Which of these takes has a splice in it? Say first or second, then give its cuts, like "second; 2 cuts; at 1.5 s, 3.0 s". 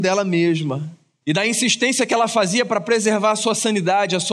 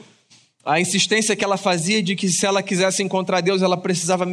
first; 1 cut; at 1.2 s